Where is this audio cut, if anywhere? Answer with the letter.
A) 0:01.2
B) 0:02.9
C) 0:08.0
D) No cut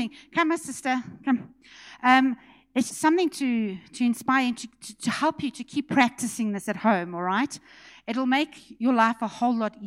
B